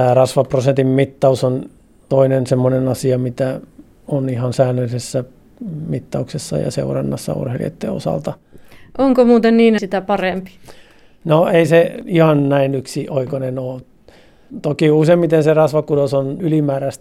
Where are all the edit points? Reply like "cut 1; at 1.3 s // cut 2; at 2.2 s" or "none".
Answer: cut 1; at 9.8 s